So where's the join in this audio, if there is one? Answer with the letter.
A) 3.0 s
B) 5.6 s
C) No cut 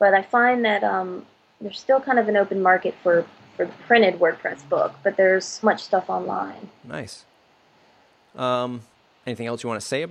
B